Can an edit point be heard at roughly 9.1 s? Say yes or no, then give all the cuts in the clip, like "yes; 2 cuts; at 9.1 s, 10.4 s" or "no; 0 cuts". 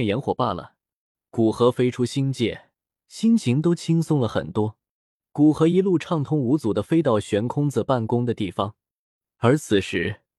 no; 3 cuts; at 1.1 s, 2.9 s, 5.2 s